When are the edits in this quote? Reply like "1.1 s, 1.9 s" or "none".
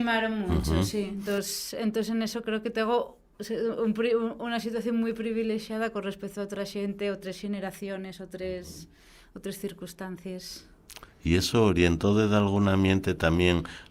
none